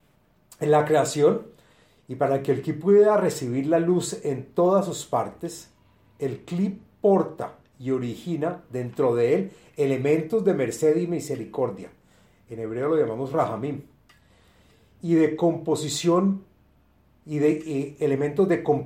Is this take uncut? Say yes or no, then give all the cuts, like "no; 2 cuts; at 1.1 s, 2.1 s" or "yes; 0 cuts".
yes; 0 cuts